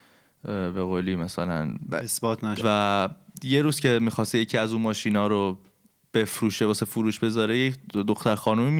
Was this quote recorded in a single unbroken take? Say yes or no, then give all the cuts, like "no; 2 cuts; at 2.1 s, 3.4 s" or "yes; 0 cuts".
no; 1 cut; at 2.6 s